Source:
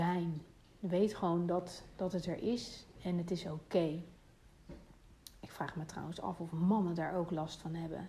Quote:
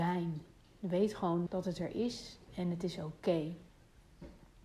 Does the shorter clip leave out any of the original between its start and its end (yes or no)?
yes